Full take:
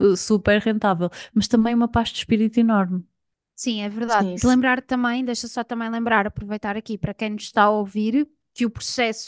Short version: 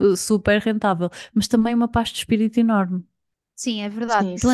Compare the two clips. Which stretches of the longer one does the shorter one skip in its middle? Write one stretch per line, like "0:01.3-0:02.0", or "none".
none